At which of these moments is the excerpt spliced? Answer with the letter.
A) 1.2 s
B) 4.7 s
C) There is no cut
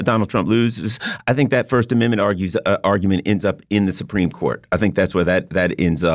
C